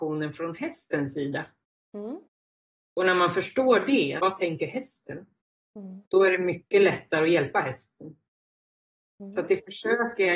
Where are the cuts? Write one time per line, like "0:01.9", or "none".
0:04.2